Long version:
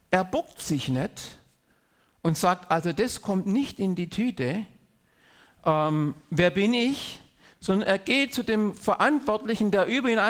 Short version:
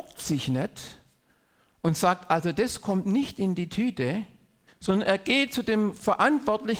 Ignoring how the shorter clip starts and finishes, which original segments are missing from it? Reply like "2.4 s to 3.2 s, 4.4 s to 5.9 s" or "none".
5.1 s to 7.5 s